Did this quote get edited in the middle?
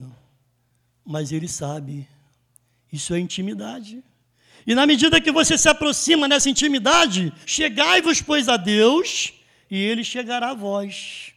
yes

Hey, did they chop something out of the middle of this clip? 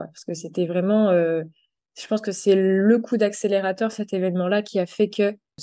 no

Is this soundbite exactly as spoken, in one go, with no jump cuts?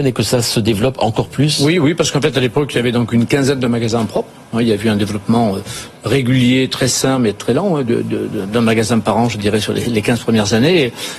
yes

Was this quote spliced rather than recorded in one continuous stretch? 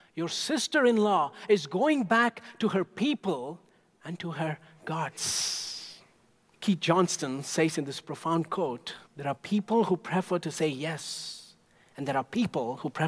yes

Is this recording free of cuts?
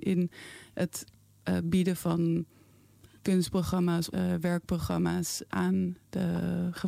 no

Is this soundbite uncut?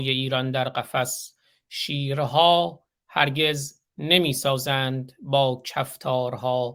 yes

